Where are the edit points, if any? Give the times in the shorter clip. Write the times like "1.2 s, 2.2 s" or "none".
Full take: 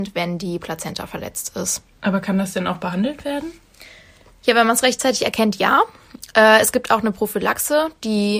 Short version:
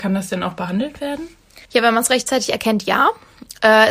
1.7 s